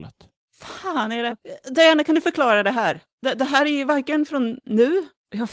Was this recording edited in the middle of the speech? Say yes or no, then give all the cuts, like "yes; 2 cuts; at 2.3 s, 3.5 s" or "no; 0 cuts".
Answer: yes; 1 cut; at 1.3 s